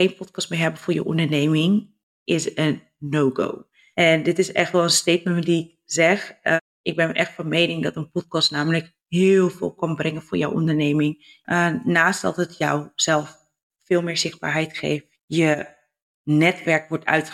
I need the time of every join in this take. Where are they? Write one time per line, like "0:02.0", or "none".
0:11.4
0:15.2